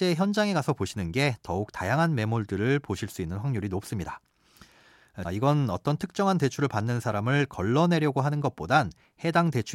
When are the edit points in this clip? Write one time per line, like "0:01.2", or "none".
0:05.2